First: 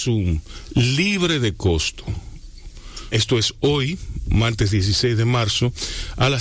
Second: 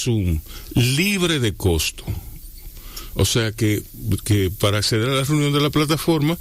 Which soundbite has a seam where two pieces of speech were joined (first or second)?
first